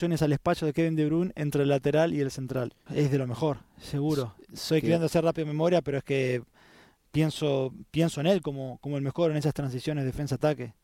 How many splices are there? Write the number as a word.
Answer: one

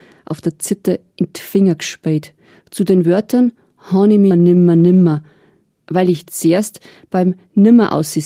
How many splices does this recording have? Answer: one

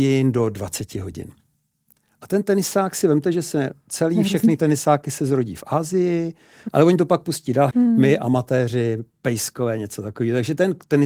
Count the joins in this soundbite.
two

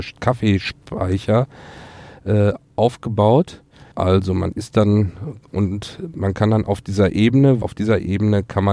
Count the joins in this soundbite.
two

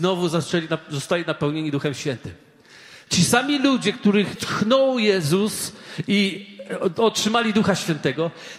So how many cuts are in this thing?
two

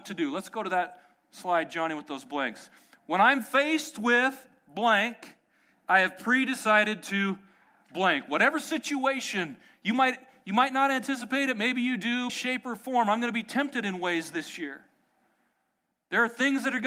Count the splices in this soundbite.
one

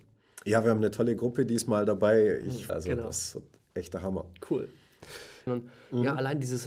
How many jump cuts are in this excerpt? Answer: two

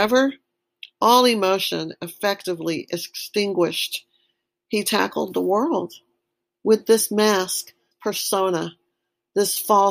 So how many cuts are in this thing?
one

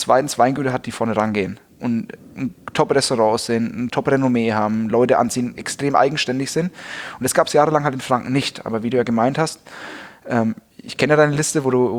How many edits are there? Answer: zero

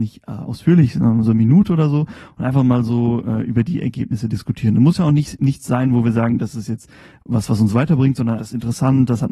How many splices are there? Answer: one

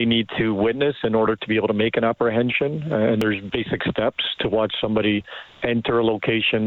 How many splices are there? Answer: zero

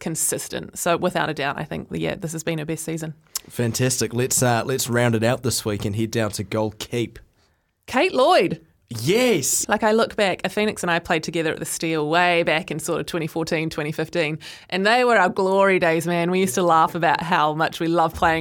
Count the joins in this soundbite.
one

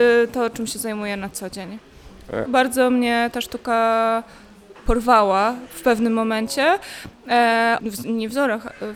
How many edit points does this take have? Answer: two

